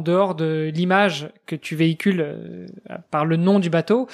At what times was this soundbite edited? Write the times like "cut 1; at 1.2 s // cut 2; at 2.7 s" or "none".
none